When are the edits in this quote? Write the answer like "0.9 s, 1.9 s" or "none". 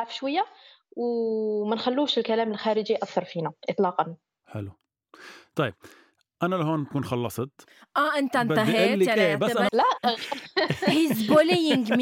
9.7 s